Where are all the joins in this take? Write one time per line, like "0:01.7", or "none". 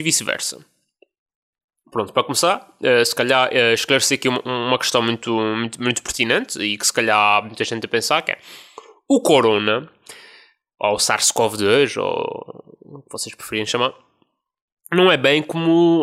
none